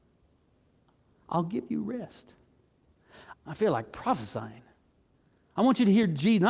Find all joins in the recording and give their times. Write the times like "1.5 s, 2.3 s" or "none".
3.3 s